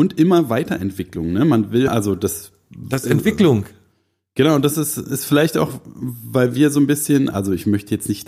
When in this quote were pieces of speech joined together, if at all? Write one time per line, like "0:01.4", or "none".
0:01.9